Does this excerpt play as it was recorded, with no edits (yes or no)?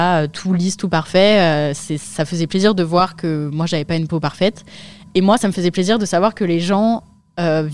yes